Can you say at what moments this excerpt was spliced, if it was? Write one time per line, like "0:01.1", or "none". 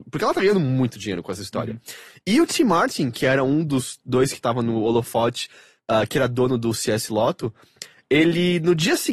none